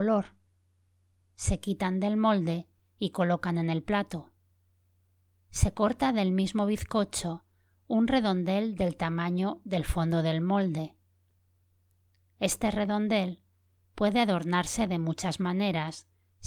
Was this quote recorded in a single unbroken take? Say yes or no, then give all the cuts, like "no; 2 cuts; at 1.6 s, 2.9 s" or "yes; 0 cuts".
yes; 0 cuts